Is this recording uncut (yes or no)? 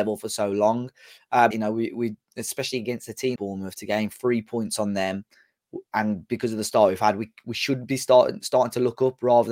no